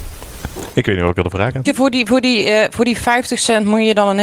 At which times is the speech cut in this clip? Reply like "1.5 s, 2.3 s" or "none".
1.7 s